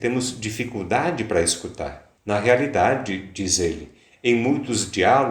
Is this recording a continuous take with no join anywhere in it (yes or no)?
no